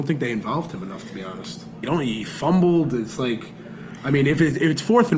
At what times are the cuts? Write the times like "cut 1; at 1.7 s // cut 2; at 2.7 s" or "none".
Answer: cut 1; at 1.8 s